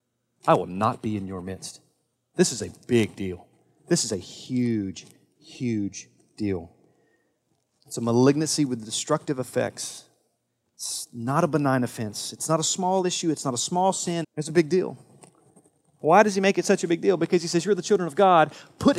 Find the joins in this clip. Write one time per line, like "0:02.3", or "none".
0:14.2